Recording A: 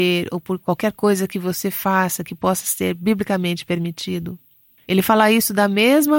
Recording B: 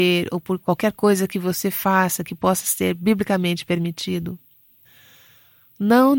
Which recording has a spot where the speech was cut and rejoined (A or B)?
A